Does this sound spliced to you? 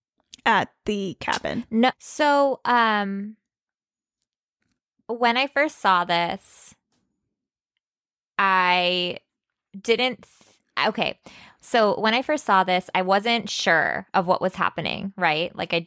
yes; 1 cut; at 1.9 s

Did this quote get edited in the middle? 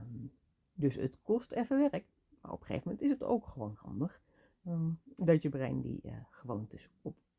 no; 0 cuts

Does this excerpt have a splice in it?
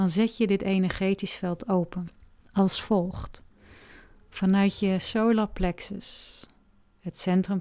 no; 0 cuts

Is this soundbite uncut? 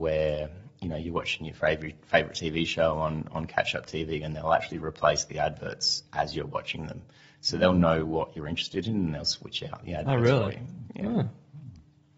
yes; 0 cuts

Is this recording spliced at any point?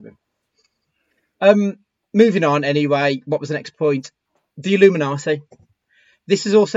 no; 0 cuts

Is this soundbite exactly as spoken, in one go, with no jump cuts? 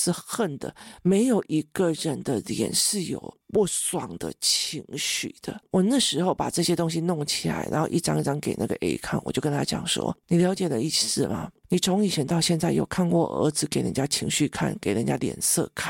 yes; 0 cuts

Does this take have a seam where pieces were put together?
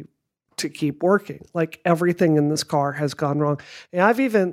no; 0 cuts

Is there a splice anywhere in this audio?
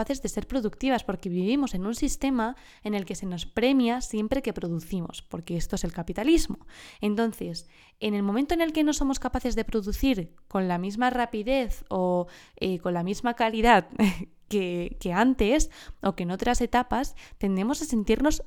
no; 0 cuts

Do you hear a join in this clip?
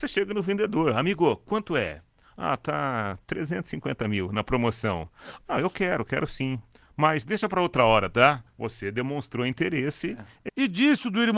yes; 3 cuts; at 5.4 s, 8.5 s, 10.5 s

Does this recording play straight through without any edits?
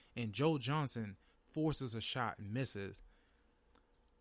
yes; 0 cuts

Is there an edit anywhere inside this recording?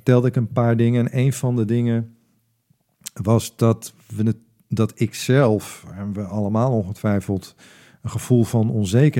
no; 0 cuts

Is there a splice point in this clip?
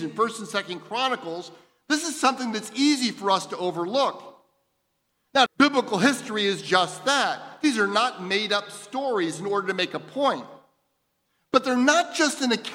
yes; 1 cut; at 5.5 s

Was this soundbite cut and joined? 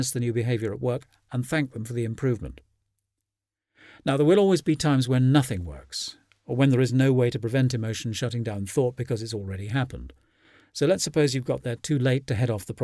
no; 0 cuts

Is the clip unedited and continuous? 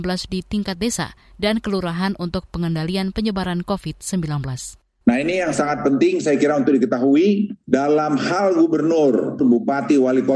no; 2 cuts; at 5.0 s, 9.4 s

